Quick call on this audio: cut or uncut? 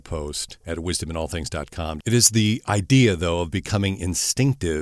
cut